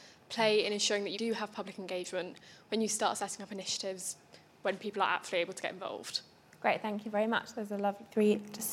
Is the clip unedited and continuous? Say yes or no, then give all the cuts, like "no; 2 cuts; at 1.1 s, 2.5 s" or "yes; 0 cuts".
no; 1 cut; at 1.1 s